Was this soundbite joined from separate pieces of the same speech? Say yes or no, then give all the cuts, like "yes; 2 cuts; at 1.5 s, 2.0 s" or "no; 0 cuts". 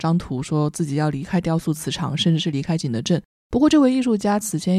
no; 0 cuts